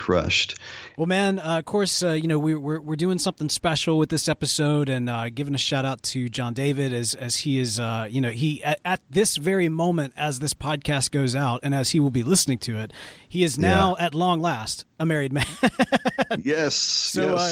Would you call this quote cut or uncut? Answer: cut